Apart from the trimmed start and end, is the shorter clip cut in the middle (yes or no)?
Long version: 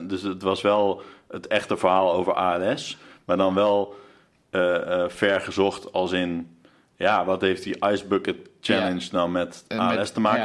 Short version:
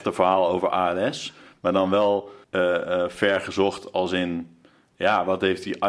yes